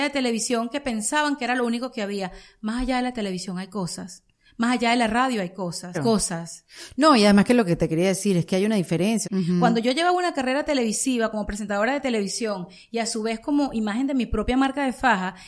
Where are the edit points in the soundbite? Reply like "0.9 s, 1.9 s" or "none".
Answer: 5.9 s, 9.2 s